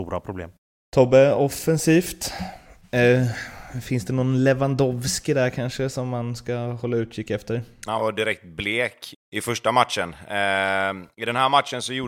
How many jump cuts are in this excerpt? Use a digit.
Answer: 2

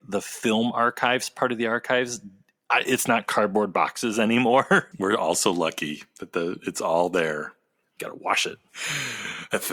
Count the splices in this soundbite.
2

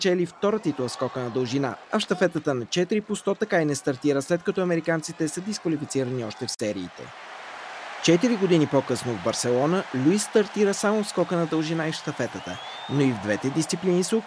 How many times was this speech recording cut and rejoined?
1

